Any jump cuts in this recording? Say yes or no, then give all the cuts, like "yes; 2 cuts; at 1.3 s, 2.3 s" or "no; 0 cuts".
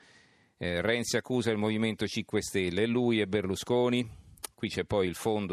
no; 0 cuts